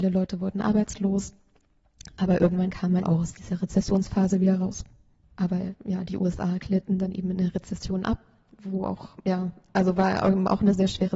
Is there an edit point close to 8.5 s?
no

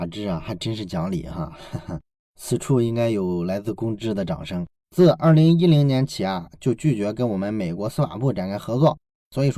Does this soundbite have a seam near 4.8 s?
yes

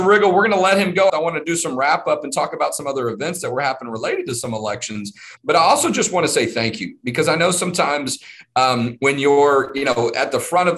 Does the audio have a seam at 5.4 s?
yes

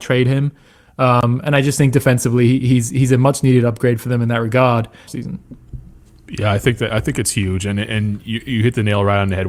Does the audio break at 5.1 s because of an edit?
yes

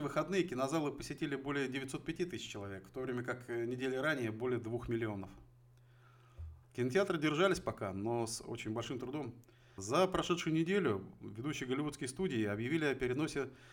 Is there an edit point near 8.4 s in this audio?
no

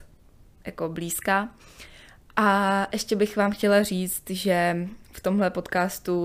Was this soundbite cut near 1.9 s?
no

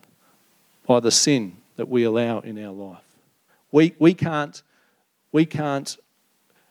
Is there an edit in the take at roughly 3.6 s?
no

